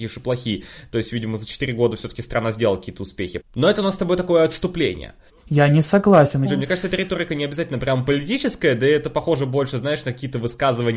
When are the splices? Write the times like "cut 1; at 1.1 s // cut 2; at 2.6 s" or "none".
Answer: cut 1; at 3.4 s // cut 2; at 5.3 s // cut 3; at 6.4 s